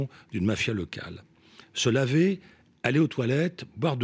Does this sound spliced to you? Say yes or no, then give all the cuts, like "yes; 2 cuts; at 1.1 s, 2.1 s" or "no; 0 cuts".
no; 0 cuts